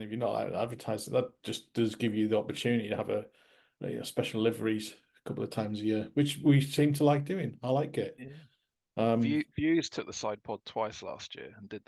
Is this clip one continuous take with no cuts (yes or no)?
yes